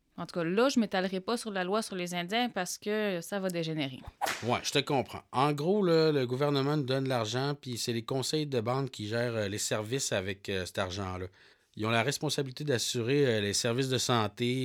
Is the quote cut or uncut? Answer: uncut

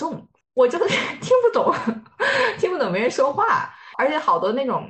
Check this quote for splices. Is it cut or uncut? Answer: uncut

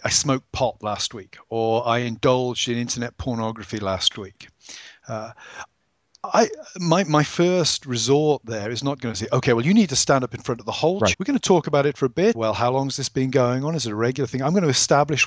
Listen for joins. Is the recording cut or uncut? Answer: cut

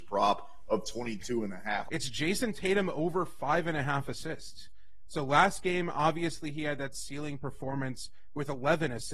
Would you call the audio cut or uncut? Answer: cut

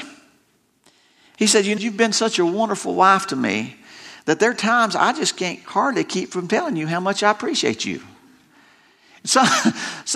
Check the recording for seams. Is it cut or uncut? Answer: cut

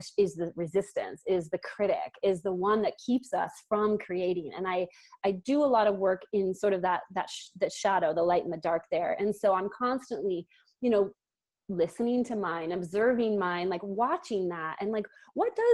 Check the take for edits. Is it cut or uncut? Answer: uncut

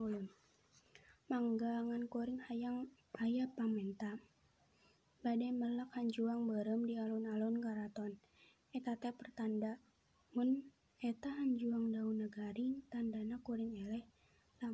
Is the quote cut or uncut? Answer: uncut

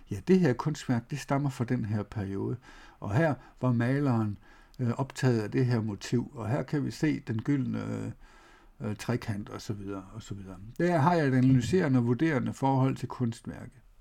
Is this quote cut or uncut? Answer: uncut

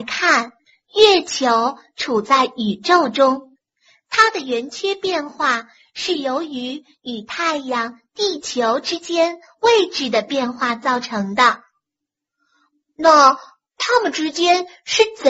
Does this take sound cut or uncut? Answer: uncut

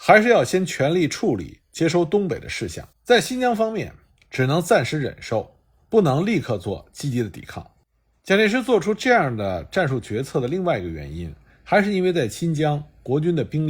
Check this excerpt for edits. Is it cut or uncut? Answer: cut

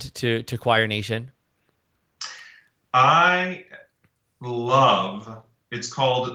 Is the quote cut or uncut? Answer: uncut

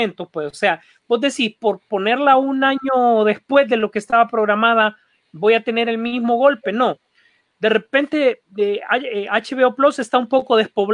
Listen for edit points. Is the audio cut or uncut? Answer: uncut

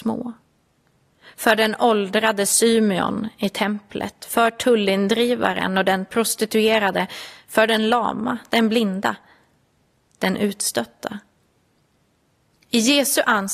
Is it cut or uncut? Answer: uncut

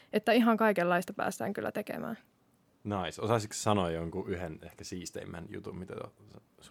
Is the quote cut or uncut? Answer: uncut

